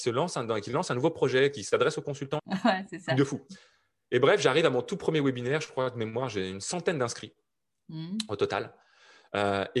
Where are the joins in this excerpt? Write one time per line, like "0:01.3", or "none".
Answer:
0:02.4